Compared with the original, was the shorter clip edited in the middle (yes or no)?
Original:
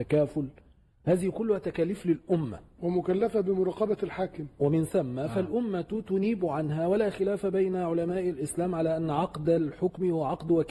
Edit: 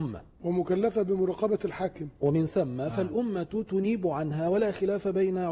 no